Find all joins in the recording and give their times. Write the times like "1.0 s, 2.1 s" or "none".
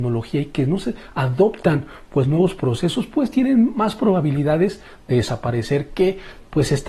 none